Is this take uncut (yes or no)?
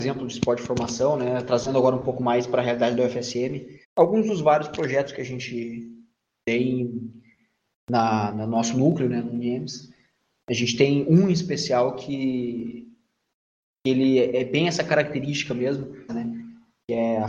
no